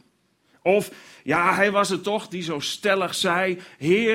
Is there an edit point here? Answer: no; 0 cuts

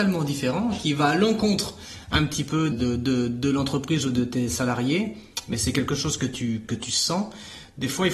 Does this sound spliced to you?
yes; 2 cuts; at 2.7 s, 6.6 s

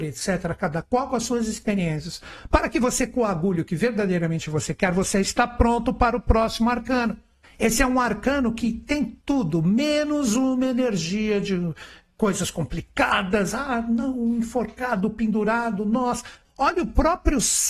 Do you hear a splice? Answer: yes; 3 cuts; at 7.4 s, 9.2 s, 16.5 s

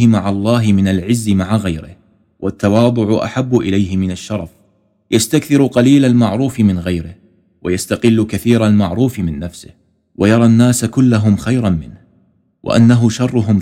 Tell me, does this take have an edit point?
no; 0 cuts

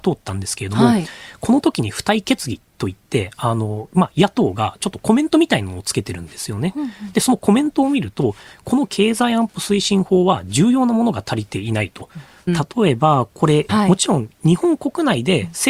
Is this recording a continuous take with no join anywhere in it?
no; 2 cuts; at 12.5 s, 13.7 s

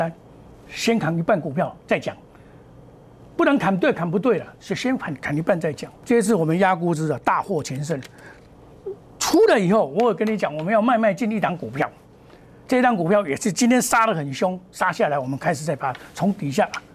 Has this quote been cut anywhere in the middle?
yes; 1 cut; at 6.0 s

